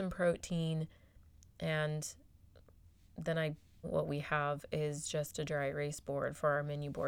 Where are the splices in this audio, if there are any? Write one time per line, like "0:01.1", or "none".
0:03.8

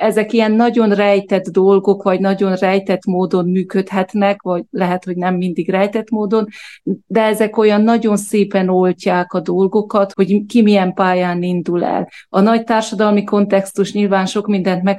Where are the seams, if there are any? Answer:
0:10.1

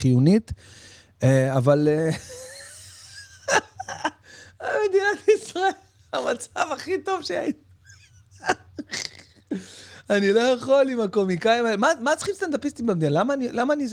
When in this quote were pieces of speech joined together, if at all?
none

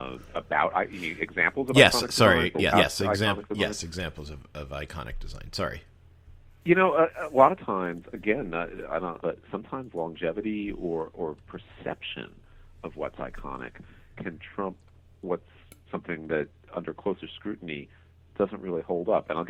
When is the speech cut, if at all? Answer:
0:02.7
0:09.2
0:15.9

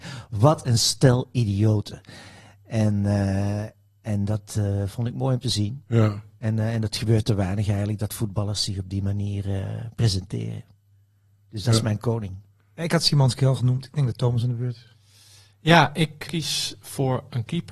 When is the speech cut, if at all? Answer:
0:12.8
0:16.3

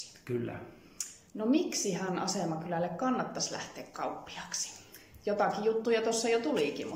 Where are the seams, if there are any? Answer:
0:01.3

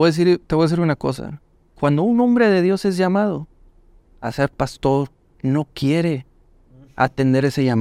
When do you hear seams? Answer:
0:05.3

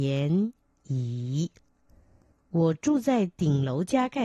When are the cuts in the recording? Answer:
0:02.3

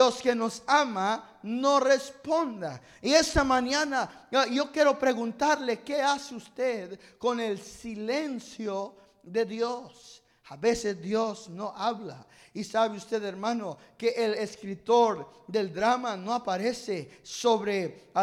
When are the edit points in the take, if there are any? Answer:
none

